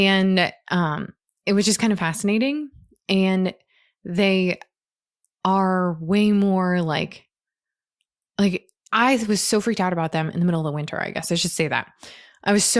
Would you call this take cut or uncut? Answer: uncut